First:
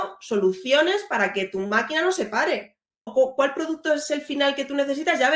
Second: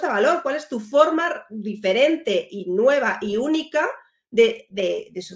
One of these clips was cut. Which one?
first; 1 cut; at 3.1 s

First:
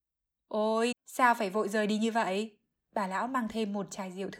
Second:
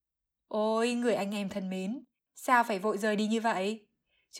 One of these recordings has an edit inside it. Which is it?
first; 2 cuts; at 0.9 s, 2.8 s

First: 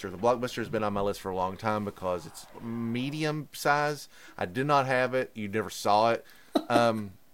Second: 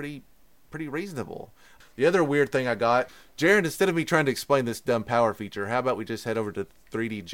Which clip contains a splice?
first; 1 cut; at 6.2 s

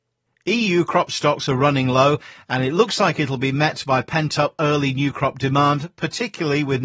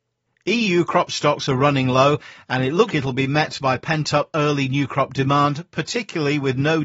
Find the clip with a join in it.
second; 1 cut; at 2.9 s

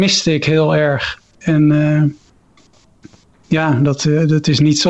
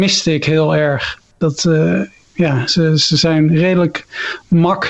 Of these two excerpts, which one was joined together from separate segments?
first; 1 cut; at 1.3 s

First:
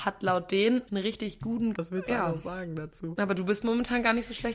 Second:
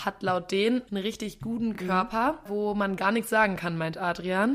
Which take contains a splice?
first; 1 cut; at 1.7 s

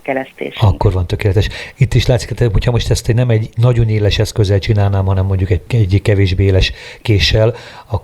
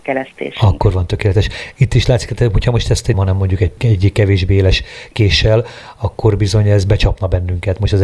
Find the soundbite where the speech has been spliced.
second; 1 cut; at 3.1 s

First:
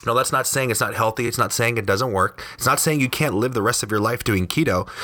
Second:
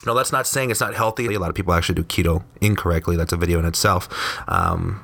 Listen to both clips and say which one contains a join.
second; 1 cut; at 1.3 s

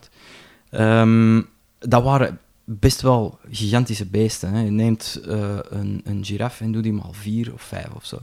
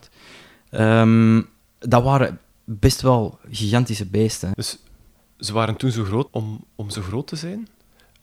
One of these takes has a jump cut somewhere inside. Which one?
second; 2 cuts; at 4.5 s, 6.3 s

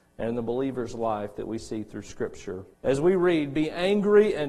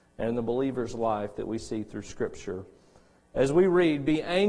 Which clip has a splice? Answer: first; 1 cut; at 2.7 s

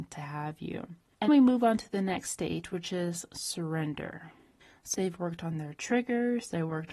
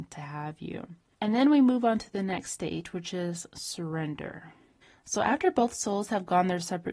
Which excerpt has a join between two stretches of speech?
first; 2 cuts; at 1.3 s, 4.9 s

